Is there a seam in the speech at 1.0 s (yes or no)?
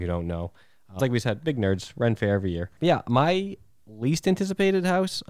yes